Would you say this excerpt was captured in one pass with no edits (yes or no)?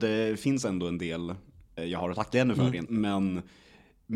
no